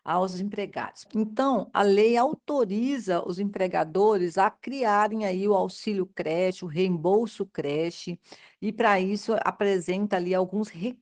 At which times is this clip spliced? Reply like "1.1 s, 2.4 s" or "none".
1.0 s